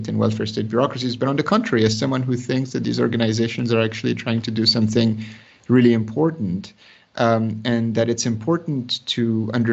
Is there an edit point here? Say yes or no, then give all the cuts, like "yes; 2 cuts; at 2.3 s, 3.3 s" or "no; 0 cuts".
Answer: no; 0 cuts